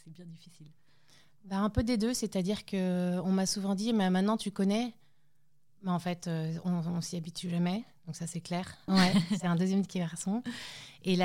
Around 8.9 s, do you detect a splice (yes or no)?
yes